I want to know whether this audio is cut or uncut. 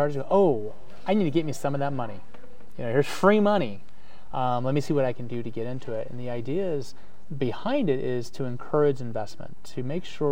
uncut